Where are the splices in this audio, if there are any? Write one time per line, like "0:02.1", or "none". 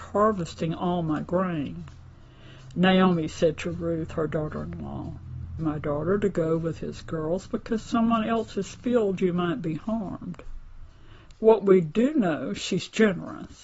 0:05.6
0:11.3

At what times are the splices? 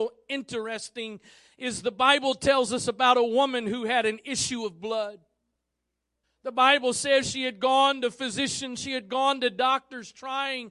0:06.2

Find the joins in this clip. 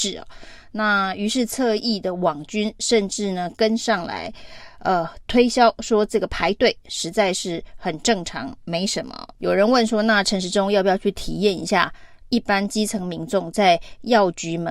0:05.3
0:09.4

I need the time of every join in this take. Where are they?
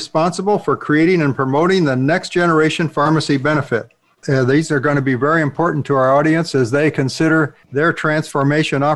0:04.2
0:07.6

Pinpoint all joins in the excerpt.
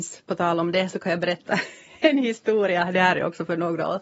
none

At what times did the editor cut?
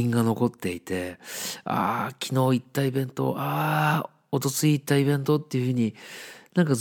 none

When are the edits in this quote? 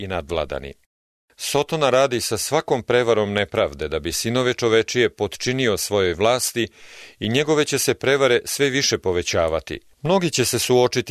0:09.9

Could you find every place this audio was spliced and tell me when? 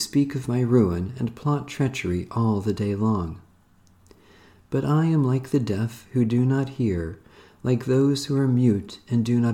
none

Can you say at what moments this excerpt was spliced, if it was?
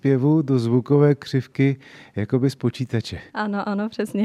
0:03.3

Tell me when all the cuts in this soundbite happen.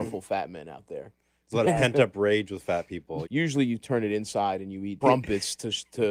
0:03.2
0:05.0

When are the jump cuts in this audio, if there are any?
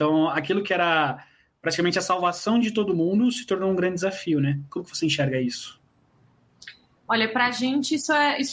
none

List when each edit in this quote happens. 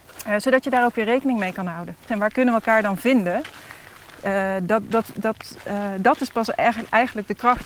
0:02.1

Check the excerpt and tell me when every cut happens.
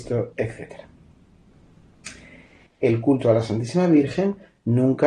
0:02.7

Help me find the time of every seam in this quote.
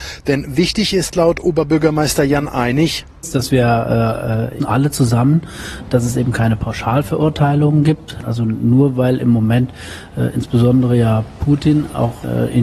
0:04.6

